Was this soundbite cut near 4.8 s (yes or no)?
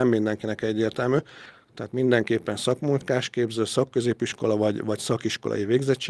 no